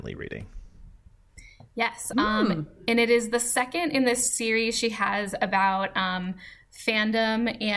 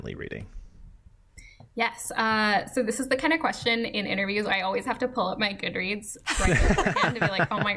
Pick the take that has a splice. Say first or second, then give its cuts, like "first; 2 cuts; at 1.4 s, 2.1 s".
first; 1 cut; at 2.1 s